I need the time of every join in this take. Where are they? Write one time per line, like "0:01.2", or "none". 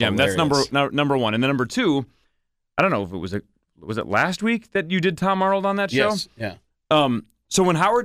none